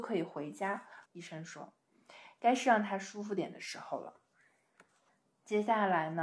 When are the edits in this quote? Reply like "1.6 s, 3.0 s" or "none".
1.1 s